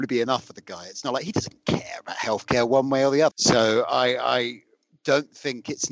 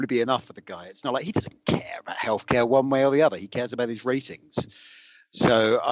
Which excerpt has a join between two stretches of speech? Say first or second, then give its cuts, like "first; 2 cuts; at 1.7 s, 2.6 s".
first; 1 cut; at 3.3 s